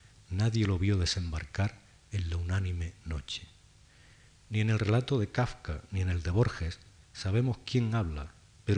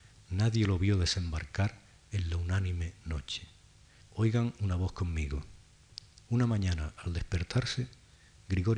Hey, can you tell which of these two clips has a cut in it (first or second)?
second